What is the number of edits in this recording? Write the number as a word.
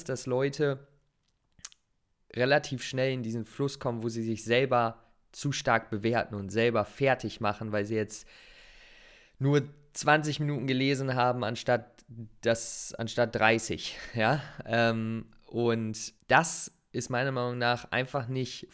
one